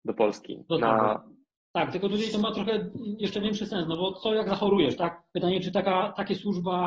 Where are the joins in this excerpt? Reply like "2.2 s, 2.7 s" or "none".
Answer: none